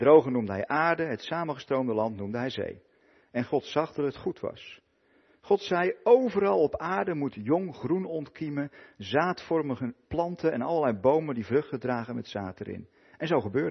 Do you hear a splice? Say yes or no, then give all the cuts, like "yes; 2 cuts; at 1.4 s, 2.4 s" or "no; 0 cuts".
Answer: no; 0 cuts